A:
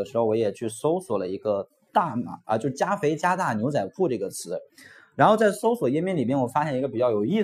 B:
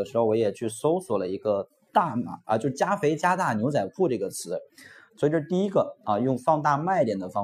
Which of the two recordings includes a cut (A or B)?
B